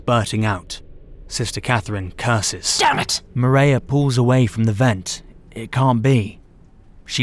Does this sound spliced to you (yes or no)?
no